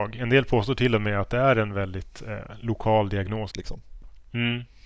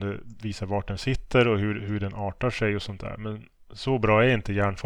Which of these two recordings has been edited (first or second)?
first